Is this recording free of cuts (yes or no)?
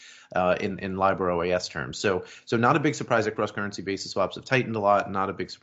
yes